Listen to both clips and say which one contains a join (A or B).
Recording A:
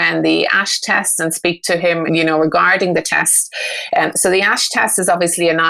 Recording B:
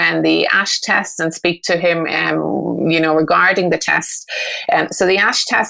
A